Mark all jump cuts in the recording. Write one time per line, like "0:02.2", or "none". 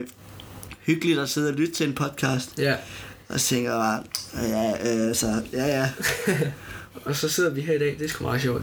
0:06.9